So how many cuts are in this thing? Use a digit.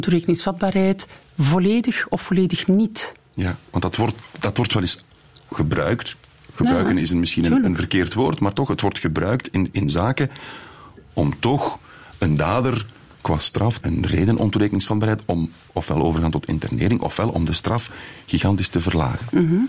1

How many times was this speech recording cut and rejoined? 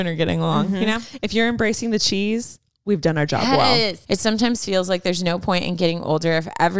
1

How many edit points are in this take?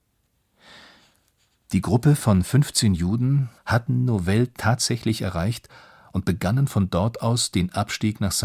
1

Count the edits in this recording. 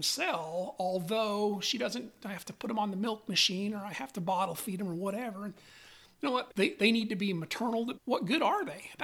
2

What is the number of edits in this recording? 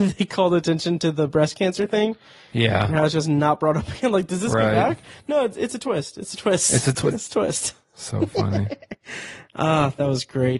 1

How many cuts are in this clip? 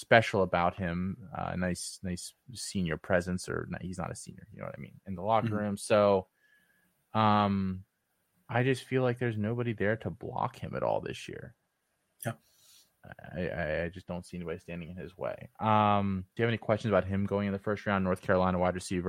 1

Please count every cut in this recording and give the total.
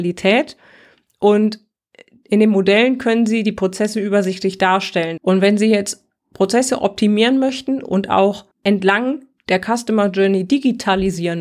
2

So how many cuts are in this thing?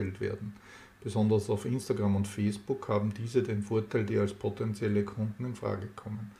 1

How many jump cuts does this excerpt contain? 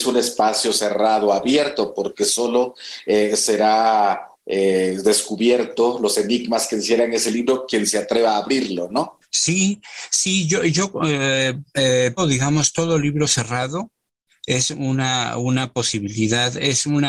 1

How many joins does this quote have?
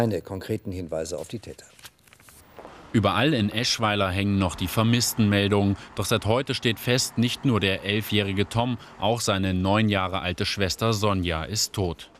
0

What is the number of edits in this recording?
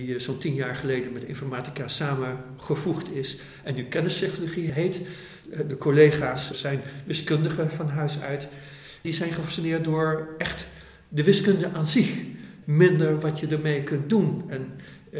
0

